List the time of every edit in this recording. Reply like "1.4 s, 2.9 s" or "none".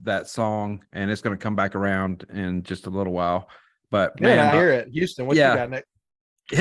4.5 s